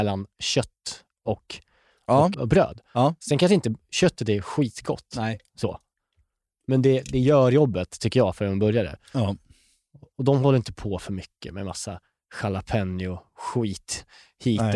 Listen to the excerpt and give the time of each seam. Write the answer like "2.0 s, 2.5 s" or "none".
2.3 s